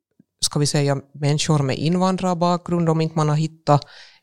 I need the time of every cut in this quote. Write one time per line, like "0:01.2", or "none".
none